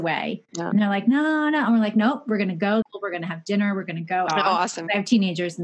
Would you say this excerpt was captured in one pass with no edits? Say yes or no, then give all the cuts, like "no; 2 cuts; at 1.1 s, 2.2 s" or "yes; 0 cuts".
no; 2 cuts; at 2.8 s, 4.3 s